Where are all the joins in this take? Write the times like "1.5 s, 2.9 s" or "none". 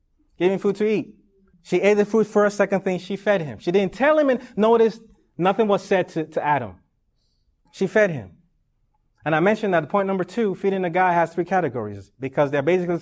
1.5 s, 7.7 s

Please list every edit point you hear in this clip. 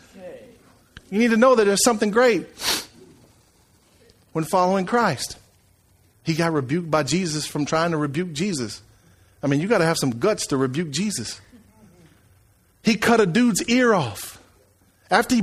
6.1 s

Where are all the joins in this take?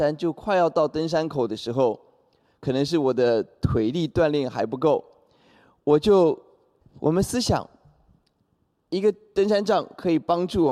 6.8 s

